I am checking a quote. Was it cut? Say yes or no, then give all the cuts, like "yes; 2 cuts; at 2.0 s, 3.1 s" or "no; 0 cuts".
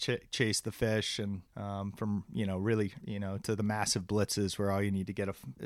yes; 2 cuts; at 1.5 s, 3.0 s